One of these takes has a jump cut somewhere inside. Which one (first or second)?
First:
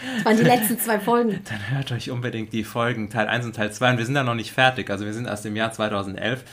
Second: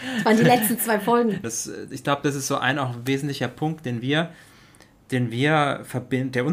second